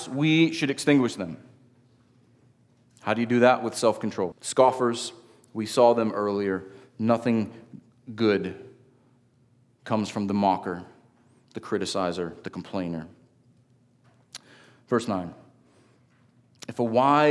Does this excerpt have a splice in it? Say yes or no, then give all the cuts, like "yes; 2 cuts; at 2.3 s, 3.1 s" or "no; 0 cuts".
yes; 1 cut; at 4.3 s